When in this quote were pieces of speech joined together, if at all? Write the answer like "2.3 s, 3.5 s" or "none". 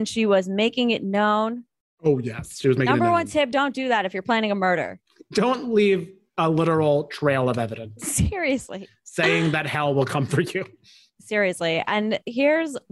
none